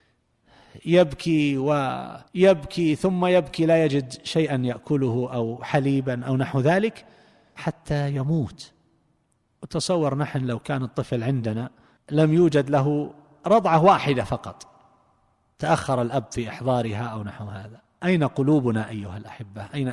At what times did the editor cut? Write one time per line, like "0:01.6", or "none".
0:02.3